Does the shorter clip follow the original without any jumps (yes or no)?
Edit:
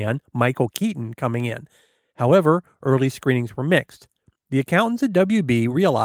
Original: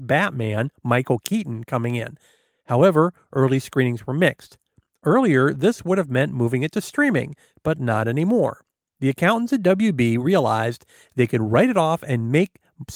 no